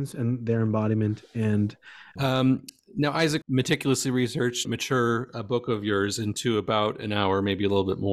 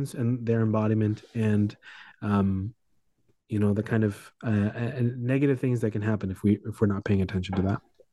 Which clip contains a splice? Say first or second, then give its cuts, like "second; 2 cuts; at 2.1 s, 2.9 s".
first; 3 cuts; at 2.2 s, 3.4 s, 4.6 s